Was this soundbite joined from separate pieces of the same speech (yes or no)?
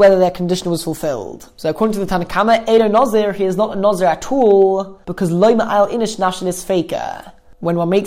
no